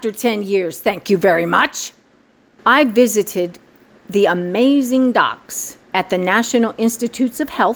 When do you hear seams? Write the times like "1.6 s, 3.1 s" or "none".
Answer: 2.6 s, 5.8 s